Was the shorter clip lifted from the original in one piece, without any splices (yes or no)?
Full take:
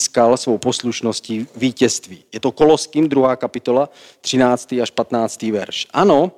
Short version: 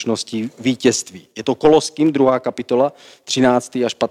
yes